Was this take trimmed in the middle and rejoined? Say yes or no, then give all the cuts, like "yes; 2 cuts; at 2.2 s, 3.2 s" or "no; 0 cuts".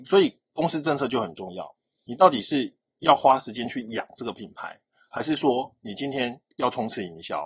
no; 0 cuts